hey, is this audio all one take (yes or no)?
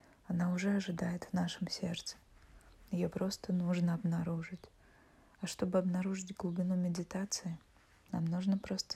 yes